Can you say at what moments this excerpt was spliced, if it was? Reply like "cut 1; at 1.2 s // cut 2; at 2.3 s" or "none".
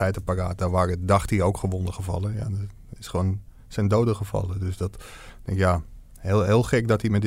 none